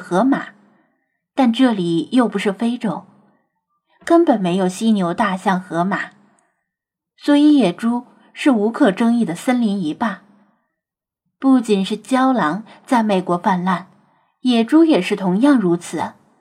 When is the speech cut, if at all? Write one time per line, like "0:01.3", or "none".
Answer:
none